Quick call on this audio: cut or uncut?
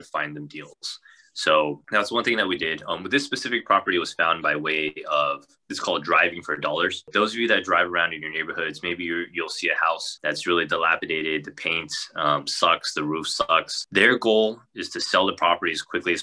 cut